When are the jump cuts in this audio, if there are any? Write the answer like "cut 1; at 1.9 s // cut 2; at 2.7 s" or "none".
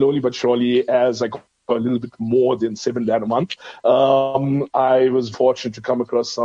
cut 1; at 5.3 s

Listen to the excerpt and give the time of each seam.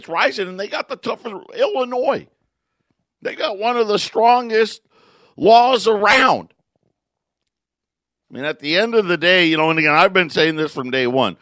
cut 1; at 8.2 s

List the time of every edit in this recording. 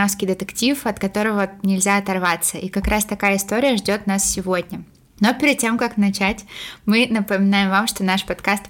none

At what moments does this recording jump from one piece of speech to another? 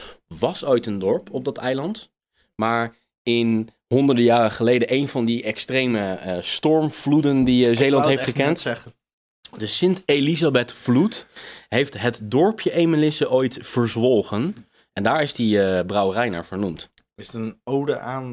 none

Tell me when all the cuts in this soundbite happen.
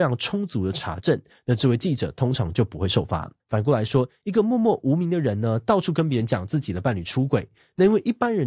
cut 1; at 3.4 s

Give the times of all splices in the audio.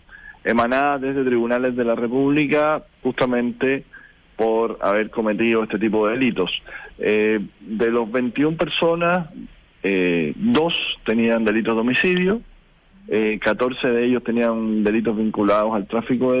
cut 1; at 3.0 s

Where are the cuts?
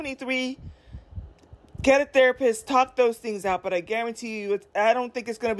none

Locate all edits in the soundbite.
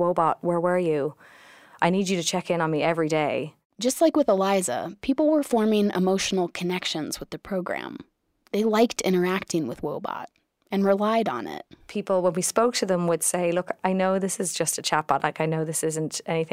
none

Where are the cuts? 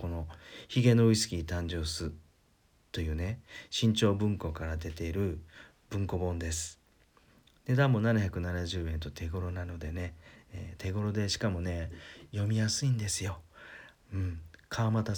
none

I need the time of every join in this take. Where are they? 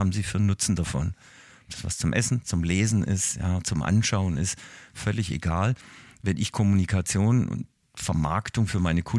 cut 1; at 2.4 s

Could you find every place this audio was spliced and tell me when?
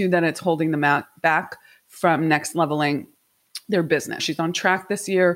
cut 1; at 4.2 s

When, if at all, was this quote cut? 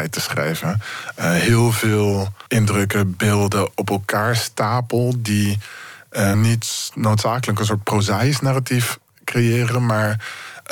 cut 1; at 2.5 s // cut 2; at 6.3 s

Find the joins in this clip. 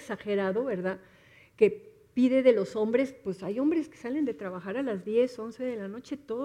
none

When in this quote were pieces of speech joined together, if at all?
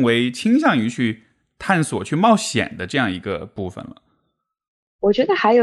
none

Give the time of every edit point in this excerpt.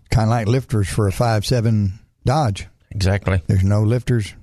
none

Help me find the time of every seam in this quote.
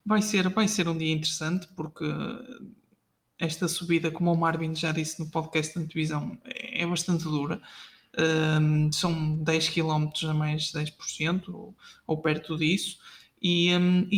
none

